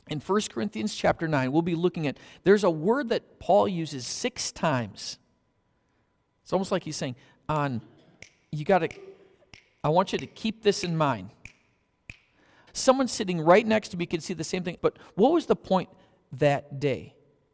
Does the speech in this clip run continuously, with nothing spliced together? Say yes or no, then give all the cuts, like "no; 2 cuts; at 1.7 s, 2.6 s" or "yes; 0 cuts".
no; 2 cuts; at 12.7 s, 14.8 s